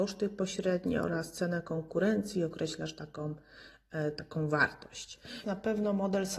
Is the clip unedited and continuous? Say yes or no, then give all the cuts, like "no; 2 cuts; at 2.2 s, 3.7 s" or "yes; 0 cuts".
no; 1 cut; at 5.4 s